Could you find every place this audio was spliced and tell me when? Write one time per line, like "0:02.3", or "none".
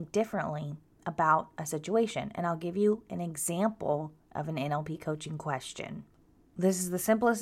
none